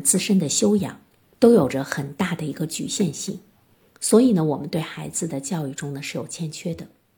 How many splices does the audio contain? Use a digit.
1